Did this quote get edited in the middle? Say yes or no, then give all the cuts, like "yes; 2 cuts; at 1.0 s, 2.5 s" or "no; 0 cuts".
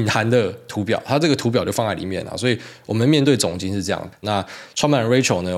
yes; 1 cut; at 4.2 s